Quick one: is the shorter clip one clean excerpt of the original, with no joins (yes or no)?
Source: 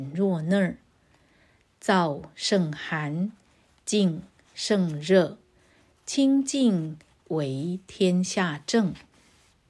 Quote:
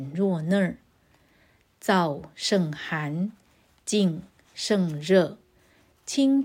yes